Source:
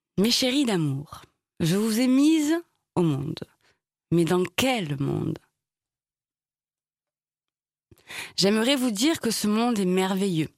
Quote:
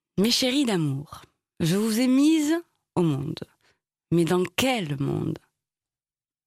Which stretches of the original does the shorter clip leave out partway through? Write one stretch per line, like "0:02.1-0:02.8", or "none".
none